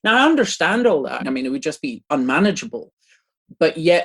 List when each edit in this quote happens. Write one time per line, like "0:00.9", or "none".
0:01.2